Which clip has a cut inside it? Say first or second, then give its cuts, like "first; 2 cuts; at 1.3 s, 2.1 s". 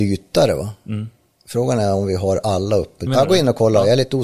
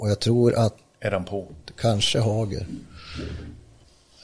first; 1 cut; at 3.1 s